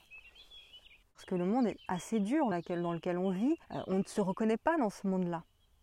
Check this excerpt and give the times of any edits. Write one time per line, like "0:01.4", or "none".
0:01.0
0:02.5
0:03.6

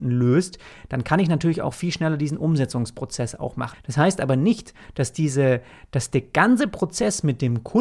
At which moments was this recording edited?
0:03.7

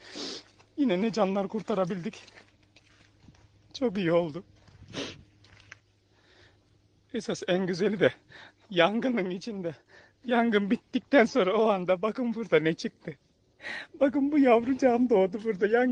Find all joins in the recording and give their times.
none

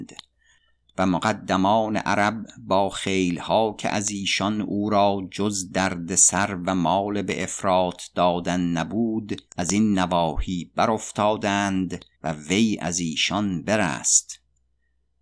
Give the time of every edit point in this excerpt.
0:09.5
0:12.1

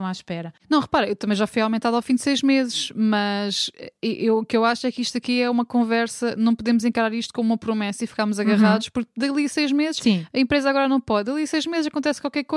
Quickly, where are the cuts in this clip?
none

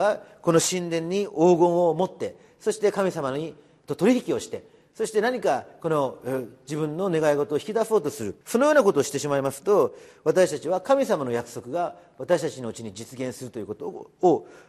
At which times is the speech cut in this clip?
0:08.4

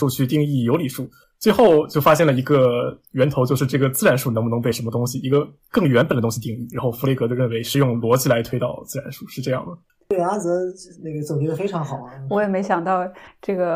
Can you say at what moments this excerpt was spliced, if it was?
none

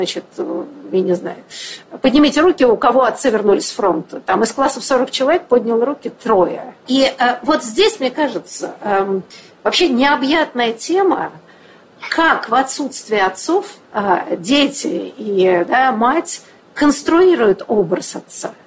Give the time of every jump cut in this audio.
0:06.9
0:13.8

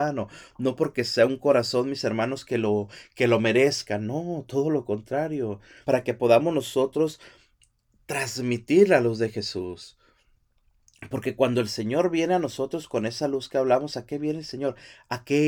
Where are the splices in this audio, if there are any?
0:05.8

